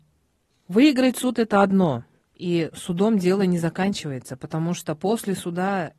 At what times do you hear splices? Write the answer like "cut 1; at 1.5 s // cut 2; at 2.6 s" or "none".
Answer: none